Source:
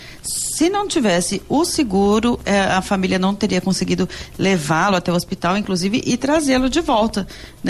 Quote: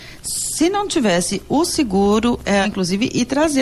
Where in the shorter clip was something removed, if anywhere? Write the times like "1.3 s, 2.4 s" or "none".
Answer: 2.6 s